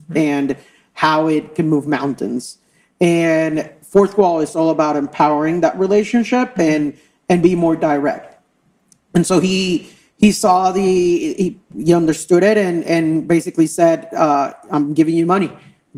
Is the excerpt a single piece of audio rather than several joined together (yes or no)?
yes